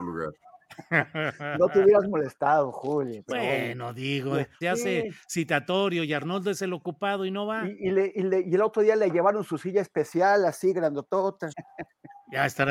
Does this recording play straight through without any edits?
no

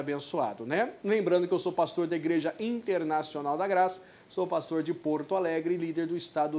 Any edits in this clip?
no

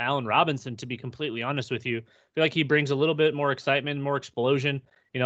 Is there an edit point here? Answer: no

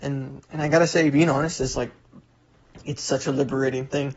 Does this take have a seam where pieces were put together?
no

